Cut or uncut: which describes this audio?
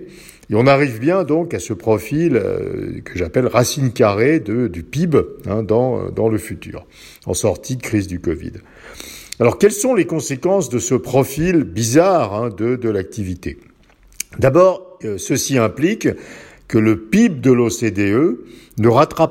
uncut